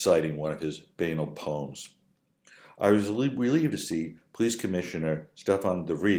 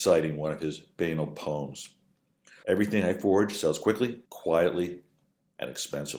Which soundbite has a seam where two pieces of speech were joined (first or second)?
second